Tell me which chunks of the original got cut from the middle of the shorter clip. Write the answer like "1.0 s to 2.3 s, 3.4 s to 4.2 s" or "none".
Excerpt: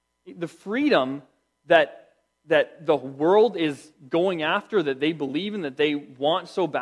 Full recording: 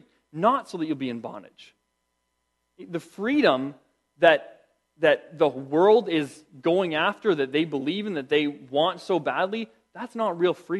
none